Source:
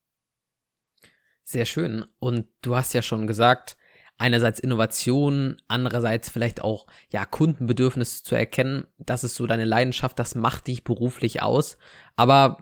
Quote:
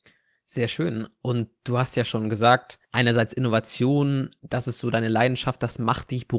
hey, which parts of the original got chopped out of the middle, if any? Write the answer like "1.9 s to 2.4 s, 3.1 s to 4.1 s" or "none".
3.8 s to 4.1 s, 5.6 s to 8.9 s